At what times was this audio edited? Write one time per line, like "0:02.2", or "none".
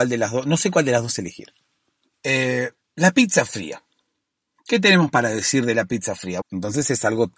0:02.1
0:06.4